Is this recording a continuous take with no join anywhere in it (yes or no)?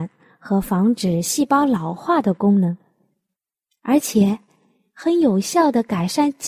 yes